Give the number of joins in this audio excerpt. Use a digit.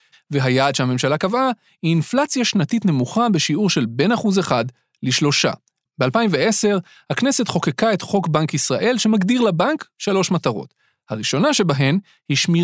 1